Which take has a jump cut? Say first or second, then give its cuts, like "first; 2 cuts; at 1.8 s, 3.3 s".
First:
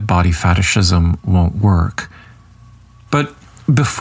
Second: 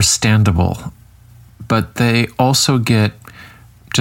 first; 1 cut; at 3.1 s